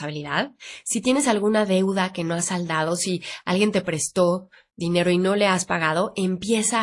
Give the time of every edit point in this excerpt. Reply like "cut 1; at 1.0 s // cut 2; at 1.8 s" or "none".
none